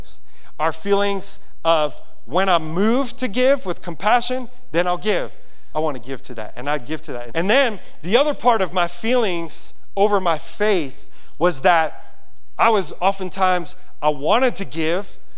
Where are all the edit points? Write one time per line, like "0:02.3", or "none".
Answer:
0:05.7
0:07.3